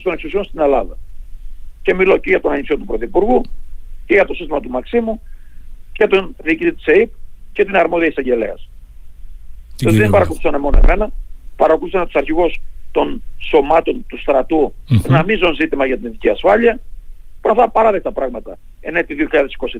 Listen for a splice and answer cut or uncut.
cut